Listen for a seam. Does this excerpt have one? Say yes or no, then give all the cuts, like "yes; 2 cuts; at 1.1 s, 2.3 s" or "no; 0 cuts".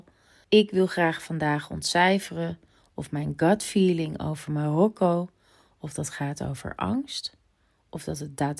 no; 0 cuts